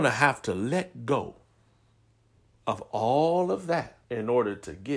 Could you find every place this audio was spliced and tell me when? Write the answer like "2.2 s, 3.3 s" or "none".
4.0 s